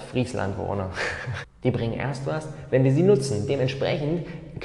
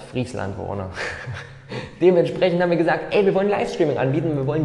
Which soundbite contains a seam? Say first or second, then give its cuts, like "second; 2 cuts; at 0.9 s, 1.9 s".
first; 1 cut; at 1.4 s